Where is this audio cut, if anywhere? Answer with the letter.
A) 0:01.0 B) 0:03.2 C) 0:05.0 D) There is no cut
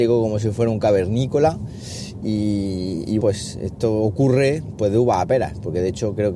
B